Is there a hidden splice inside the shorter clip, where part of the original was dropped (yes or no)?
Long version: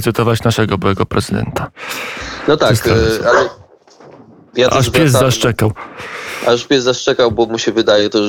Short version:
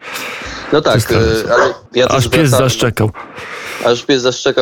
yes